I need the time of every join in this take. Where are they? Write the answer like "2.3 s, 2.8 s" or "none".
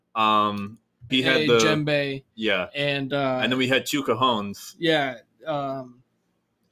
1.1 s